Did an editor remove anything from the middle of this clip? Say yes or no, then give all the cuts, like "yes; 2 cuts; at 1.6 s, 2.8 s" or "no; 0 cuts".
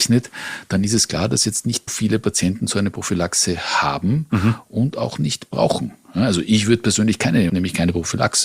yes; 2 cuts; at 1.9 s, 7.5 s